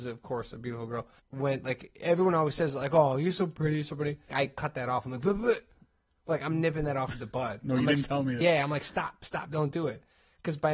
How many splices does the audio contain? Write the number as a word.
two